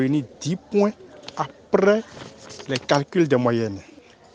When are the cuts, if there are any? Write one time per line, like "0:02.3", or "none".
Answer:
none

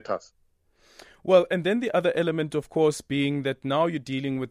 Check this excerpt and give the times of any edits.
none

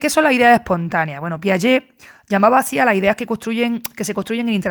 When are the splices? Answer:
none

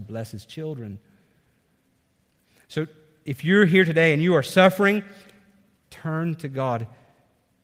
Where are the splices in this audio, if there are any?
0:05.9

